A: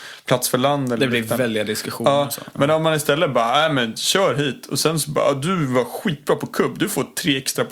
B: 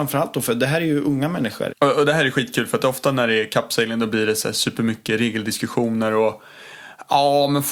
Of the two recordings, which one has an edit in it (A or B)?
B